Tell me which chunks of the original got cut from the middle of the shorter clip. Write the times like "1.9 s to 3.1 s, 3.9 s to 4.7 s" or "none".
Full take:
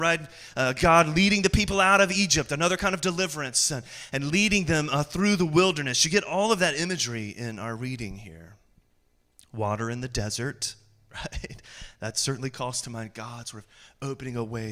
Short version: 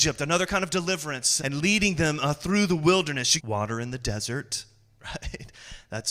3.7 s to 4.1 s, 6.1 s to 9.5 s